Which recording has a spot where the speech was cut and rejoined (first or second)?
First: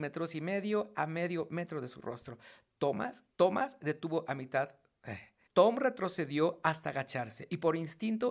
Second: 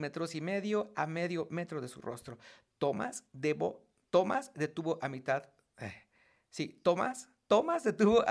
first